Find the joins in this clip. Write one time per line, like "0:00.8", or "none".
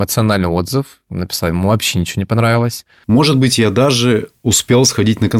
0:03.0